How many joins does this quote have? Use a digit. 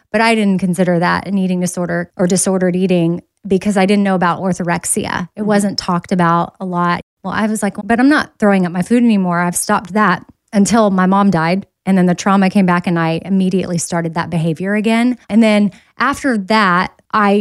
2